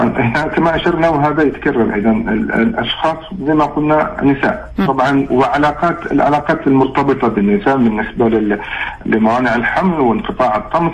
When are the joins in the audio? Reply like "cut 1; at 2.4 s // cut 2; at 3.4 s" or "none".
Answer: cut 1; at 4.8 s